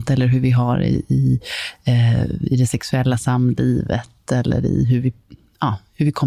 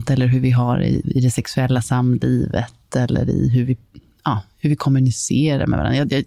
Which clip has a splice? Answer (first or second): second